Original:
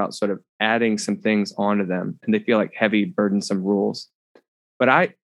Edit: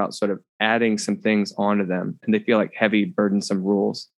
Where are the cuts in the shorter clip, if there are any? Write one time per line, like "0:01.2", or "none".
none